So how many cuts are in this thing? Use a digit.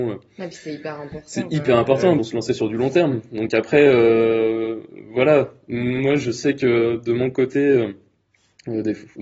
1